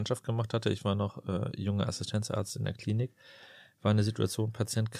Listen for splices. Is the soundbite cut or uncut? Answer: uncut